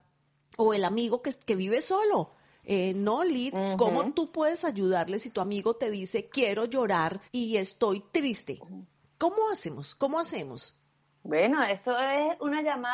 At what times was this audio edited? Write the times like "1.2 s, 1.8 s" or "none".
7.3 s